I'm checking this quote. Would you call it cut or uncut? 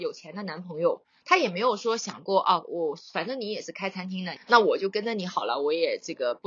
cut